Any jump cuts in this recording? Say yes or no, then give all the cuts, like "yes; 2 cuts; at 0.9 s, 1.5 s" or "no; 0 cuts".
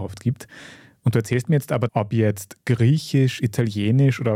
yes; 1 cut; at 1.9 s